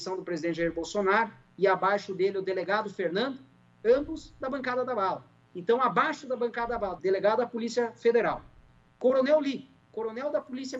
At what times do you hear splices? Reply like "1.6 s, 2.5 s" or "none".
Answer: 7.0 s